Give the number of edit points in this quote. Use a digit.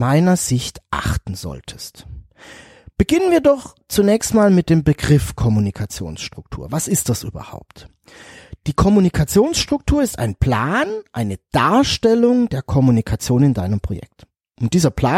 0